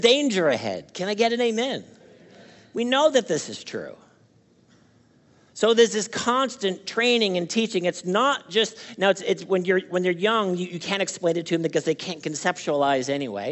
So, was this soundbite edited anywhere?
no; 0 cuts

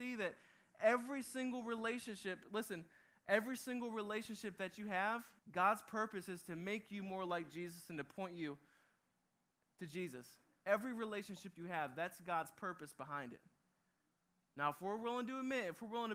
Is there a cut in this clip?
yes; 1 cut; at 5.4 s

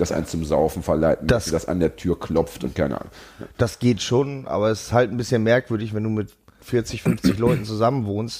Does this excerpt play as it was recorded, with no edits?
yes; 0 cuts

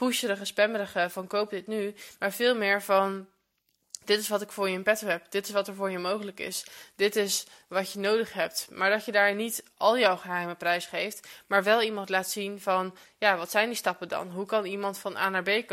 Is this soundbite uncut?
yes; 0 cuts

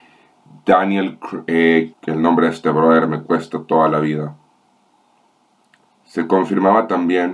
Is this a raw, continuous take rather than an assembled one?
no; 1 cut; at 1.9 s

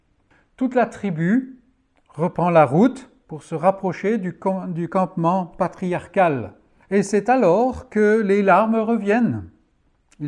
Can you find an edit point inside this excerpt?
no; 0 cuts

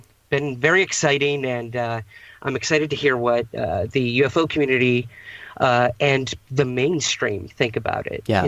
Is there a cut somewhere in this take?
no; 0 cuts

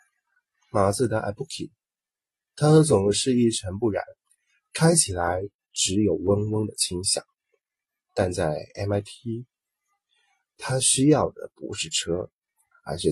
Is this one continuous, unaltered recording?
yes; 0 cuts

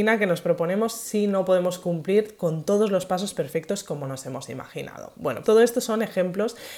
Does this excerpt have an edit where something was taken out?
yes; 1 cut; at 5.4 s

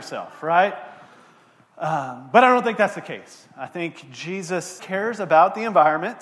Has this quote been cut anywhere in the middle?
yes; 1 cut; at 4.8 s

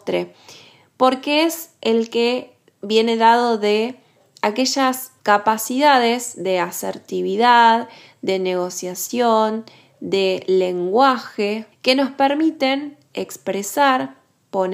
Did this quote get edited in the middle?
yes; 2 cuts; at 5.2 s, 11.7 s

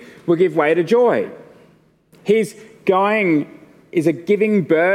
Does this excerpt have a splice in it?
no; 0 cuts

